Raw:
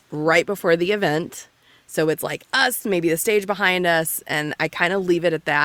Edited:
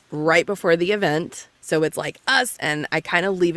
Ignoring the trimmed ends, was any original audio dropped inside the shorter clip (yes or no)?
yes